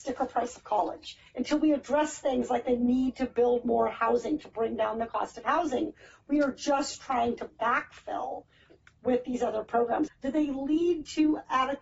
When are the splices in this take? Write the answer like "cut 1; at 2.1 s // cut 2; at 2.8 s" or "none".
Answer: cut 1; at 1.3 s // cut 2; at 10.1 s